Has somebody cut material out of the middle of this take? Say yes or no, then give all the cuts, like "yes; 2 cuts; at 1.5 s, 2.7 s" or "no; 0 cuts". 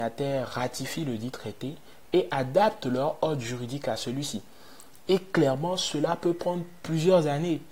no; 0 cuts